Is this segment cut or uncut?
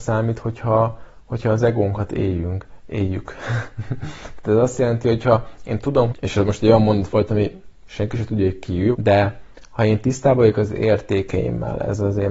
cut